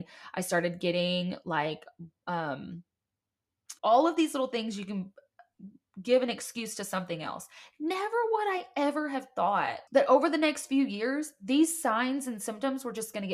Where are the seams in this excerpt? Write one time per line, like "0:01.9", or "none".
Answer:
0:03.8
0:09.9